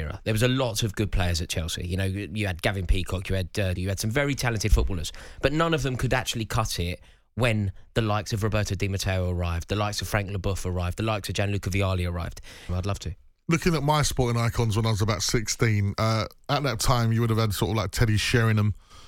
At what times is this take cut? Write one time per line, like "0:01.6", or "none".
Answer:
0:03.8
0:12.7